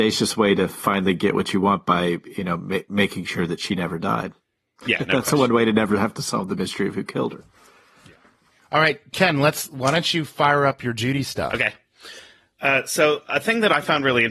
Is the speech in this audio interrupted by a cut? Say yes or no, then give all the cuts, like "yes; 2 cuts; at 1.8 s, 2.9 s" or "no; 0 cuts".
no; 0 cuts